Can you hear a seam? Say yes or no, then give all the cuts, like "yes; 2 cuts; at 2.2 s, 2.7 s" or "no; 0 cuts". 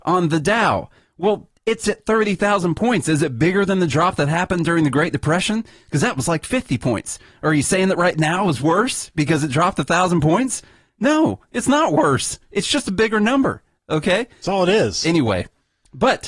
no; 0 cuts